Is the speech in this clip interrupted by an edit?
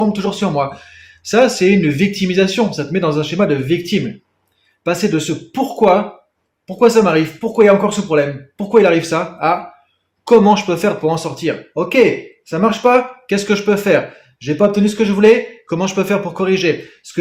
no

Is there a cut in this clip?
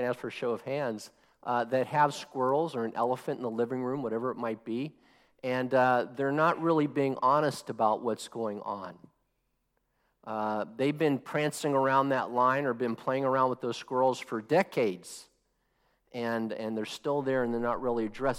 no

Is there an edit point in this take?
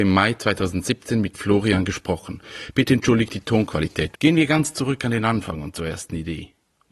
yes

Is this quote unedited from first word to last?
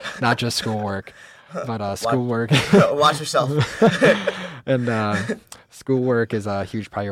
yes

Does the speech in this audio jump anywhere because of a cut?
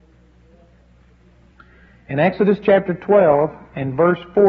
no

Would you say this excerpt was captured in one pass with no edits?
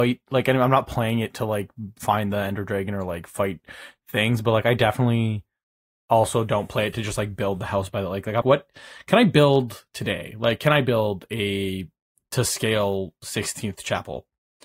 no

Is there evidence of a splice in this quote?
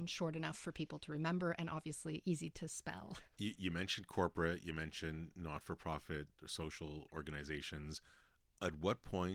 no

